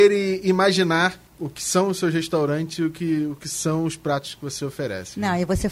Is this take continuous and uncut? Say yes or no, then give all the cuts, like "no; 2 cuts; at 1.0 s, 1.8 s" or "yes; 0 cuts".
no; 1 cut; at 1.3 s